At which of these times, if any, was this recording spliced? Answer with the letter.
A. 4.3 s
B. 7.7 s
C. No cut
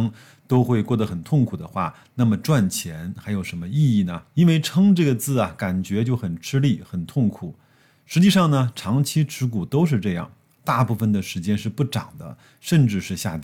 A